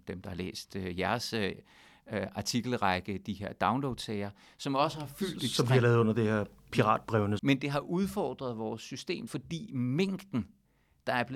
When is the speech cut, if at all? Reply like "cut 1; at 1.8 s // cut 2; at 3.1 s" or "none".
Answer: cut 1; at 7.4 s // cut 2; at 9.3 s